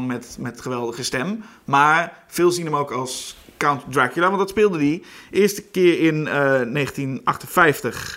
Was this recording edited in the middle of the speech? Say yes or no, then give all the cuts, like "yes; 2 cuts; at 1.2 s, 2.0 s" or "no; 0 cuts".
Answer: no; 0 cuts